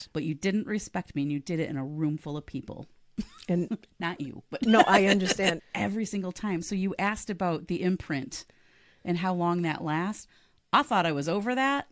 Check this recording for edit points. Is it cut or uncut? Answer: cut